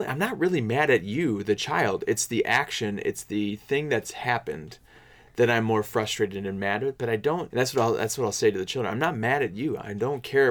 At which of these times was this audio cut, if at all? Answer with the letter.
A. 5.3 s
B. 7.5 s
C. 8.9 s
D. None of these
B